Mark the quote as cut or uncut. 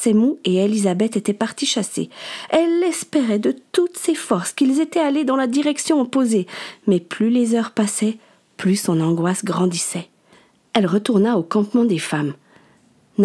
uncut